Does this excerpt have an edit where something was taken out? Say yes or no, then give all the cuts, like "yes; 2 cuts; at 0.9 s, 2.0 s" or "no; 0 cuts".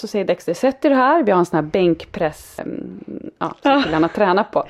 yes; 1 cut; at 2.6 s